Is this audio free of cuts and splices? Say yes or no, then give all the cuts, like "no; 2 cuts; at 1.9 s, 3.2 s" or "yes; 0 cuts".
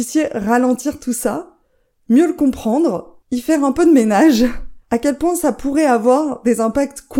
no; 2 cuts; at 3.2 s, 4.8 s